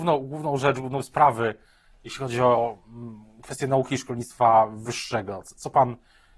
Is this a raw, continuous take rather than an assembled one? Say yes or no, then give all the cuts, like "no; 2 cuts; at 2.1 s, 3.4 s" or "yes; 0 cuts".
yes; 0 cuts